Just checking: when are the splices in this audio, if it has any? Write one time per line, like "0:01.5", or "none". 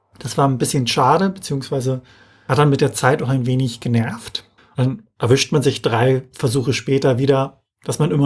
0:04.6